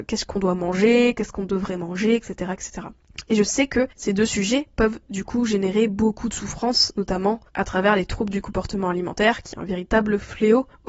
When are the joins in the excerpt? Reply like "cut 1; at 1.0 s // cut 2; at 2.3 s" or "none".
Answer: cut 1; at 3.9 s // cut 2; at 7.5 s